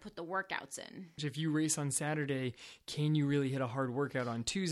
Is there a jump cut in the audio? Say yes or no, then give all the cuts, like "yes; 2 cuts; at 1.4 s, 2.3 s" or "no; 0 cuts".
yes; 1 cut; at 1.2 s